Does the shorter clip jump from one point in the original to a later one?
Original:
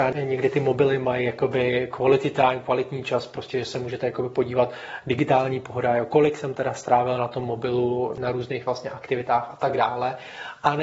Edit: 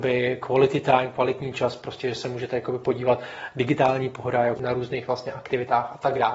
yes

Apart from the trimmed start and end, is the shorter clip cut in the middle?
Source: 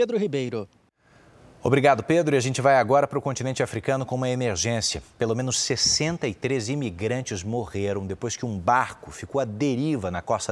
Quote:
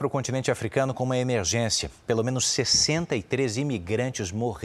no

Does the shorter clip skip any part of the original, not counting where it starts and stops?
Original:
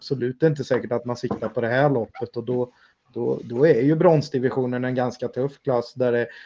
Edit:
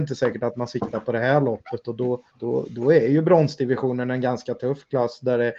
yes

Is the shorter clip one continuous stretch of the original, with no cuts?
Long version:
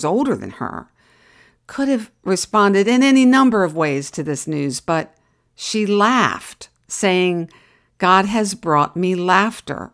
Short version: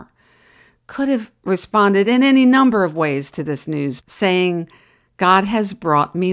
no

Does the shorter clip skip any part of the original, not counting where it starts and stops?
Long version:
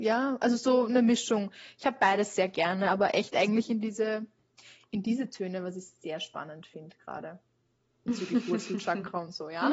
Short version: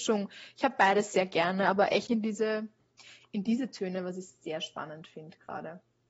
yes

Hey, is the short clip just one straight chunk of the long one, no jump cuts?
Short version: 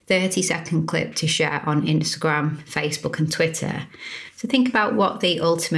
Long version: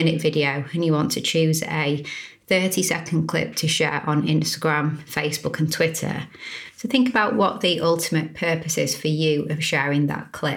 yes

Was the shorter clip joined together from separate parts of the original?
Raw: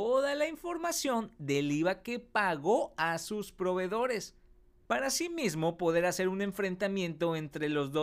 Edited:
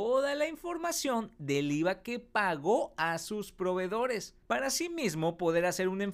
yes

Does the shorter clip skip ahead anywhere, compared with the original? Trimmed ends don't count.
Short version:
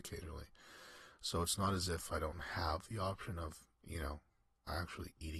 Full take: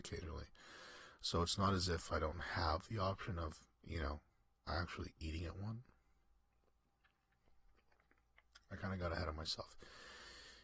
no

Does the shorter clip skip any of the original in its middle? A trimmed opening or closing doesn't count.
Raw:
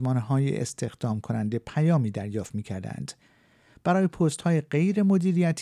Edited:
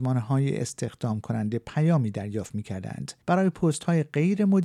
yes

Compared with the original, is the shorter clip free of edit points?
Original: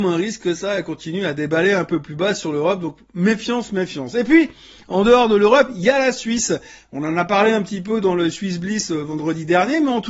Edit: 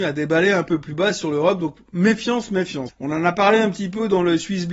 no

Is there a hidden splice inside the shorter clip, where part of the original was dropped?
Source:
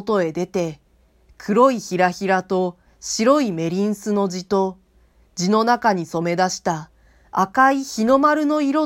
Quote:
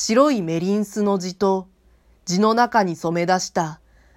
no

